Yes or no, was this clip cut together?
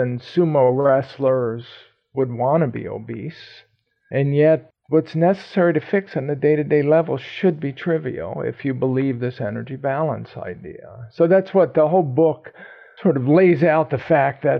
no